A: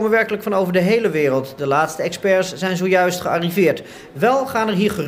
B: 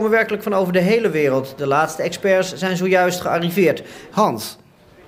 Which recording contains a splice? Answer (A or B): B